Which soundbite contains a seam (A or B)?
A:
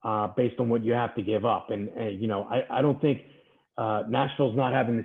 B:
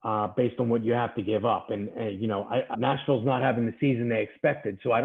B